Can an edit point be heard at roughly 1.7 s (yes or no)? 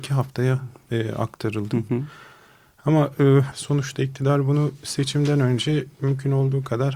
no